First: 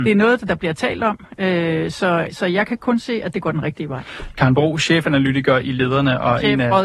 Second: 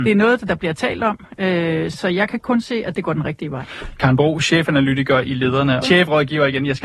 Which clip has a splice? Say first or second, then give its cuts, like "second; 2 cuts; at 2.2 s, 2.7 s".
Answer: second; 2 cuts; at 1.9 s, 5.8 s